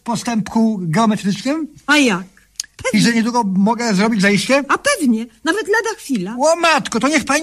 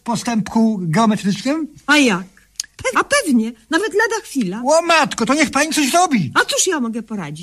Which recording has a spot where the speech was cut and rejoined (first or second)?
second